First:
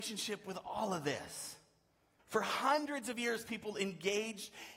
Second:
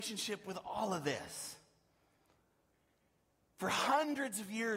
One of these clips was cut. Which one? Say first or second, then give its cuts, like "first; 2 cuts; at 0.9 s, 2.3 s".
first; 1 cut; at 2.2 s